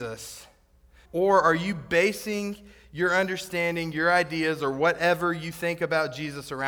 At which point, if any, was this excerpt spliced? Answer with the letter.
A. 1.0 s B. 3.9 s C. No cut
A